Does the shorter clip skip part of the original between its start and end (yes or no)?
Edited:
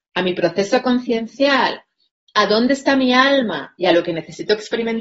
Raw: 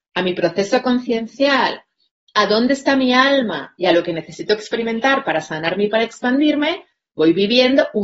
no